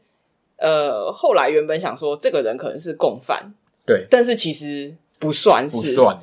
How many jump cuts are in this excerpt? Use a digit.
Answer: 0